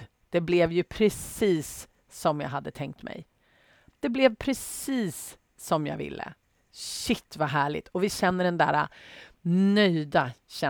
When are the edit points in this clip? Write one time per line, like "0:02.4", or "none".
none